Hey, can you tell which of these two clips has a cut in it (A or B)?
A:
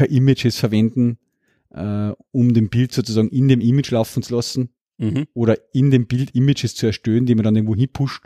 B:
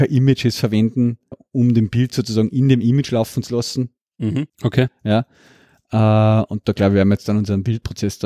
B